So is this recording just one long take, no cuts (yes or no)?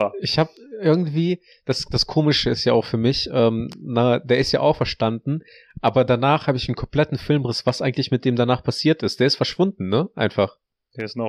yes